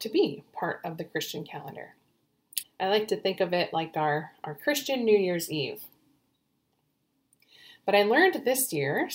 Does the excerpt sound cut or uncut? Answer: cut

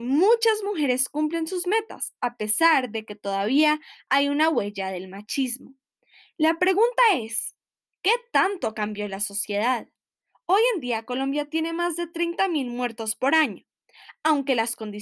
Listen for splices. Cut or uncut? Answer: uncut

